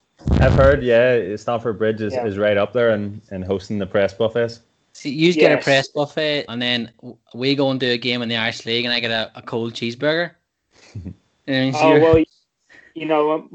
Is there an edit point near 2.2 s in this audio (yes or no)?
no